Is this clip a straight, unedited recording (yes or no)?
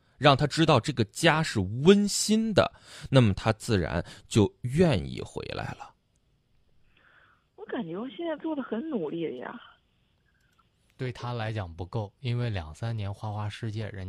yes